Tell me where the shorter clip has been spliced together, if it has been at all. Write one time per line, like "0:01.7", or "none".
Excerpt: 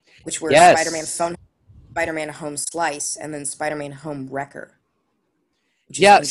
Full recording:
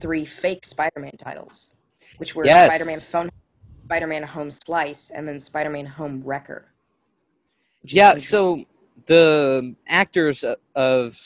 none